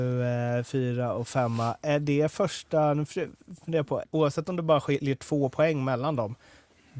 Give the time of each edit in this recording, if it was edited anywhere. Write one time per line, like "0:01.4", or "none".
0:04.0